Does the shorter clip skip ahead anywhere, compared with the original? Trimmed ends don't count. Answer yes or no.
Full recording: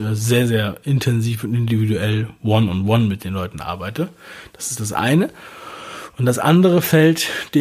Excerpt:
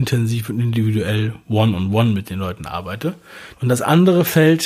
yes